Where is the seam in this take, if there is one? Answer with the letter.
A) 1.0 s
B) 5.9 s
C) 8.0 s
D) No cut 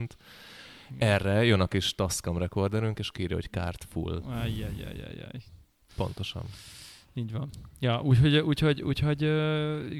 B